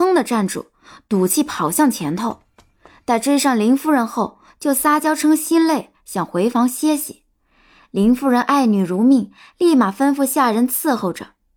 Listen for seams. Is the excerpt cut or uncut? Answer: uncut